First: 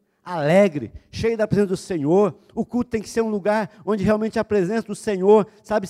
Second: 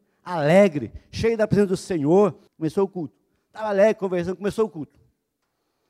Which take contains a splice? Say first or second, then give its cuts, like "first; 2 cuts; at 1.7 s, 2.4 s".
second; 1 cut; at 2.5 s